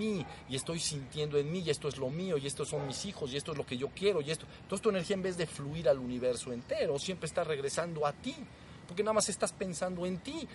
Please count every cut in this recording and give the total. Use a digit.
0